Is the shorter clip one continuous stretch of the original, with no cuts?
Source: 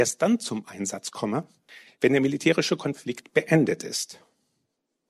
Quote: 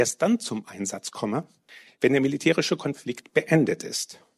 yes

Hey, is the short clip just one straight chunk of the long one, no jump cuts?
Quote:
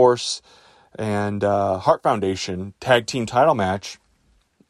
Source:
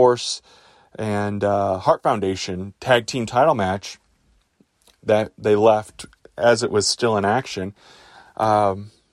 yes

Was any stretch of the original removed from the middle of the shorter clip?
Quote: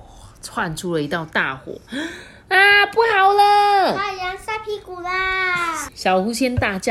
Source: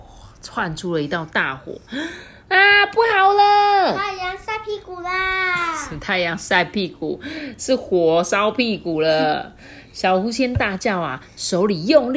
yes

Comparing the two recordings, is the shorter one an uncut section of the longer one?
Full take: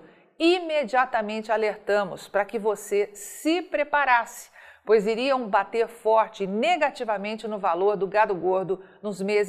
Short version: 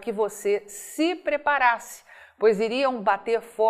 yes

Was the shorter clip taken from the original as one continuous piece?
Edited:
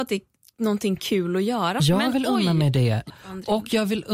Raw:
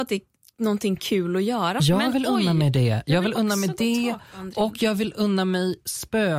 no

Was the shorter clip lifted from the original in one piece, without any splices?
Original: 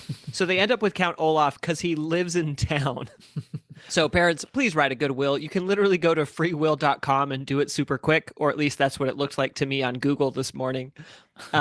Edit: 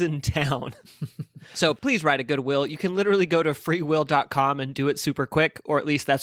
no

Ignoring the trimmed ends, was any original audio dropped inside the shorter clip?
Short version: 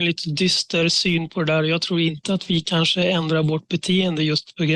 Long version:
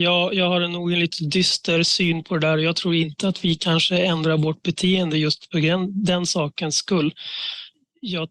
no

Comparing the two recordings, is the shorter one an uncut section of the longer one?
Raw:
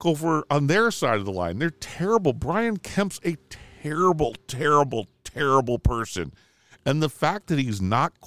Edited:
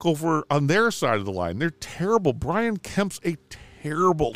yes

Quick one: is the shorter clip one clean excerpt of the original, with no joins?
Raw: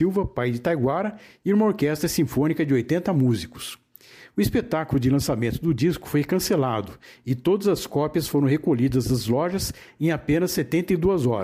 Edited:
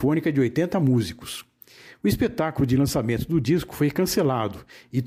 yes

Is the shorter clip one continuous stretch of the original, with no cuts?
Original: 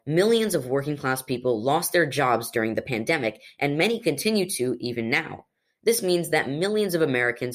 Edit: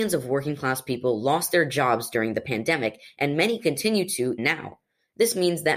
no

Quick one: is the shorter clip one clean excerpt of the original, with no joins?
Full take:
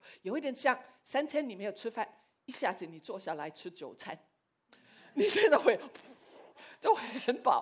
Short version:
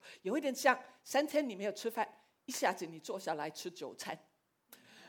yes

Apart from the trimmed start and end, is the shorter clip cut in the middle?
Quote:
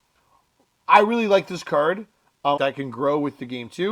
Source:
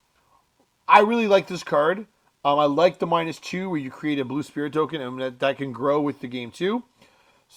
yes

